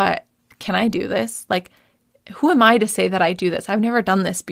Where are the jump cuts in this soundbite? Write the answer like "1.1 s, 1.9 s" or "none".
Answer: none

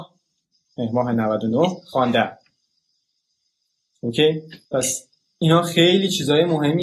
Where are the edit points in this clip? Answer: 4.6 s

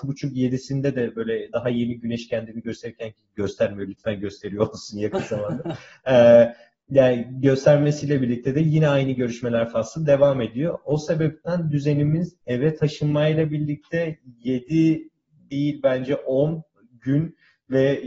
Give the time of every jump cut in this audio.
none

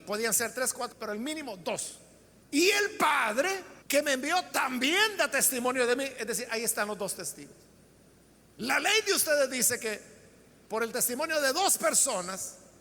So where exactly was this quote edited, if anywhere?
0.9 s, 2.4 s, 3.8 s

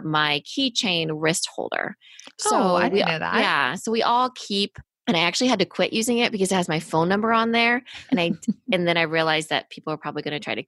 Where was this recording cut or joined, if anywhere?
none

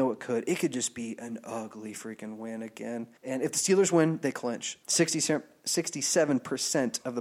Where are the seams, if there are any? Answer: 3.2 s, 4.8 s

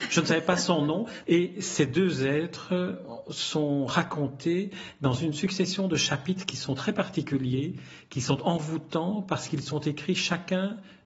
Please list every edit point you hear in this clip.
1.2 s

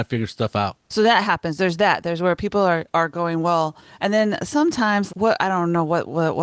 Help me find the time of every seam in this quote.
5.1 s

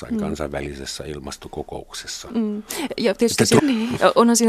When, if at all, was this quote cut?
3.6 s

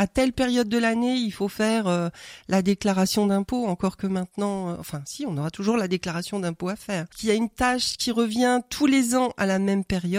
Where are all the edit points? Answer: none

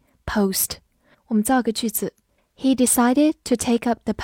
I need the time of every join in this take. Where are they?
1.1 s

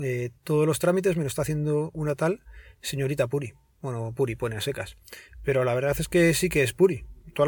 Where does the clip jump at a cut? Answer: none

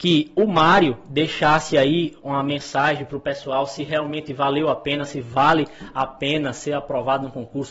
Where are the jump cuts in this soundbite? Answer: none

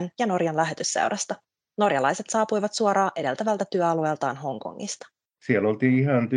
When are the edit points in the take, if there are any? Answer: none

